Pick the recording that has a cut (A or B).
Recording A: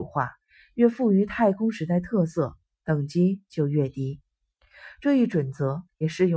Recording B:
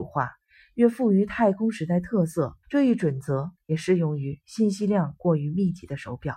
B